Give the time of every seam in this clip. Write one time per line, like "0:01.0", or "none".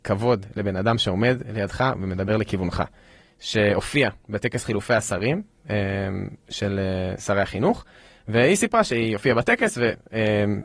0:03.2